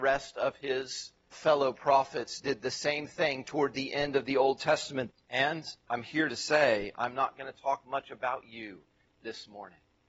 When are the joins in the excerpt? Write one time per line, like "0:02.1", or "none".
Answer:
0:01.3
0:05.1